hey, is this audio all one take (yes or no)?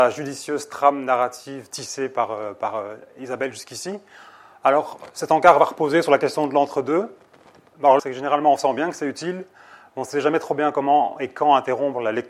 no